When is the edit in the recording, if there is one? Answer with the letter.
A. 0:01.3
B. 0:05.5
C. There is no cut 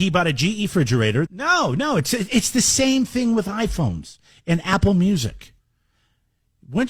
A